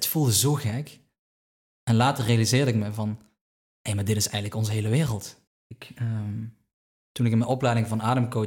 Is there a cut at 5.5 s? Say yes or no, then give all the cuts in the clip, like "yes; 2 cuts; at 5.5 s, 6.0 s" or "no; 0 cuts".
yes; 1 cut; at 5.5 s